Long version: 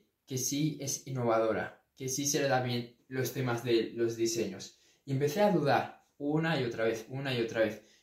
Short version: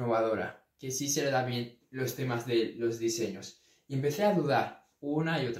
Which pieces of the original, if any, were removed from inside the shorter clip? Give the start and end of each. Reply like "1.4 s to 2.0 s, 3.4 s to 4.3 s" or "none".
none